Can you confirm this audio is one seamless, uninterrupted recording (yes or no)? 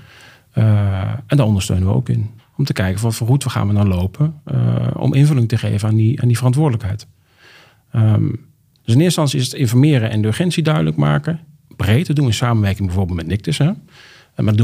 no